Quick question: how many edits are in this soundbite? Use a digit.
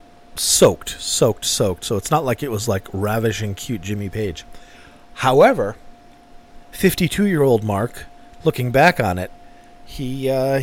0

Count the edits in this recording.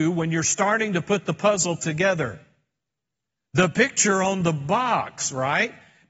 0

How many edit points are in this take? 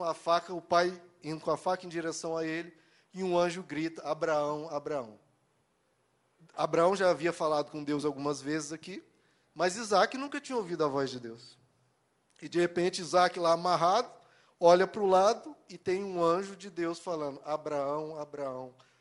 0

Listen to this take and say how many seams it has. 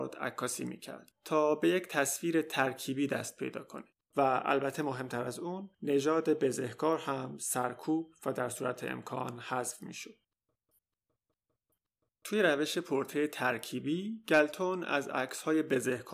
1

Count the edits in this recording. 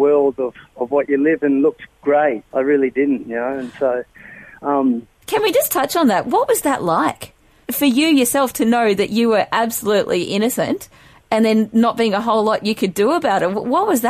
1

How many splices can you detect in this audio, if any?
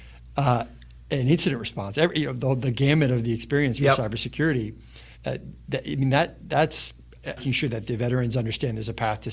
2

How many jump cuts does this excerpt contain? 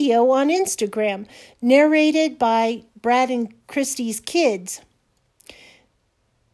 0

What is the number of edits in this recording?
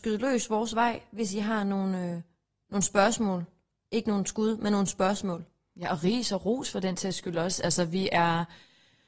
0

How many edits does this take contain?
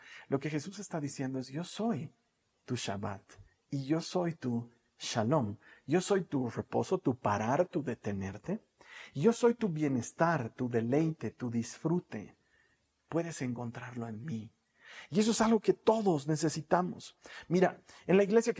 0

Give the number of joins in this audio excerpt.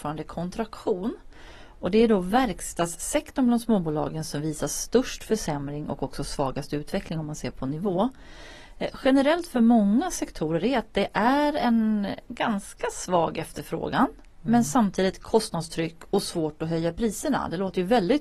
0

